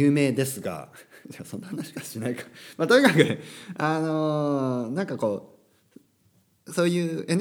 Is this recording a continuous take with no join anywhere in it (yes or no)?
yes